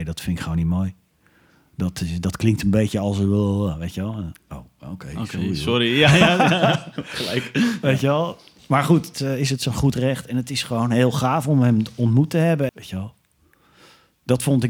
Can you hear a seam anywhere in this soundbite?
yes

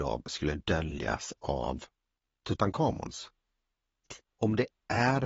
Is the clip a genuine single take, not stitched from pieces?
no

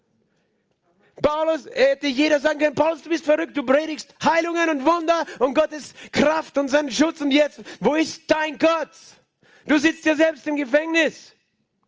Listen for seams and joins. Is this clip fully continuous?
yes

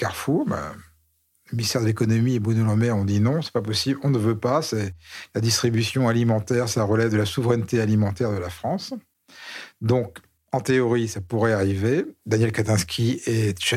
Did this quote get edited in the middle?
no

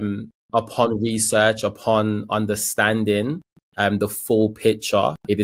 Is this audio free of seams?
yes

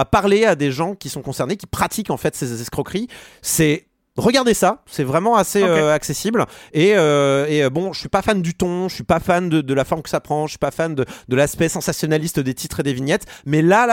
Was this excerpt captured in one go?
yes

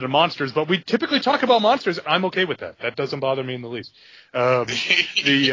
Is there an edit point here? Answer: no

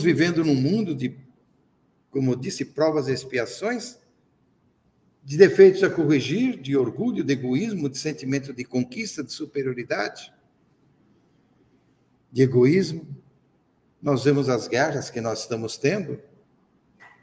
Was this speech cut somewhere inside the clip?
no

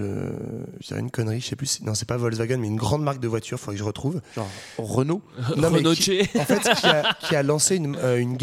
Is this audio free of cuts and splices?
yes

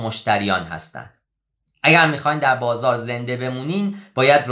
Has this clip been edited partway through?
no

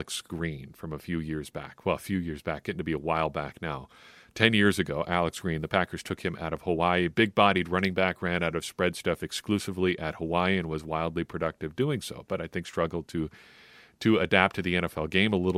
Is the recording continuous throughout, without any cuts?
yes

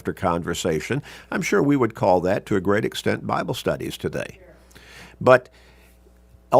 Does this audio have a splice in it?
no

